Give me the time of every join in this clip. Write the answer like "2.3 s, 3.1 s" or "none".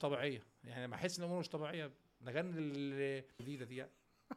3.4 s